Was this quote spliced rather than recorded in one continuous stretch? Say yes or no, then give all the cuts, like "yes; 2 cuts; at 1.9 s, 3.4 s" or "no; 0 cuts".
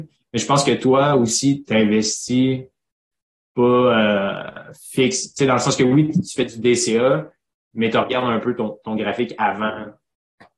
no; 0 cuts